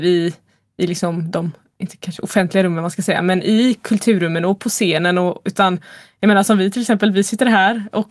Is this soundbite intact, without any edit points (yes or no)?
yes